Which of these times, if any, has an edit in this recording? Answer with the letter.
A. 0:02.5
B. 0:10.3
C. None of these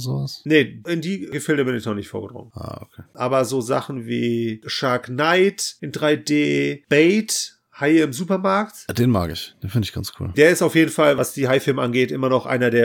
B